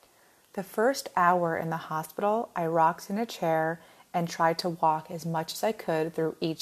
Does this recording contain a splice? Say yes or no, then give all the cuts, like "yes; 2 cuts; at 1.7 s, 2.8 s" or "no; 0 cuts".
no; 0 cuts